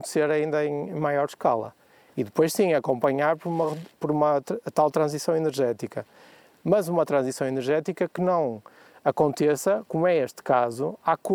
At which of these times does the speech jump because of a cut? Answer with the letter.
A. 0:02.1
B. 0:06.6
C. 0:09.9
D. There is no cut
A